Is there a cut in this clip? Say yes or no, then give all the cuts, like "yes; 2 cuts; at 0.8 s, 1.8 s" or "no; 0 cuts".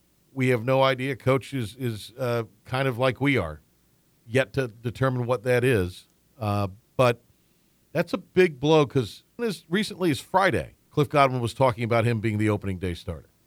yes; 2 cuts; at 9.4 s, 10.8 s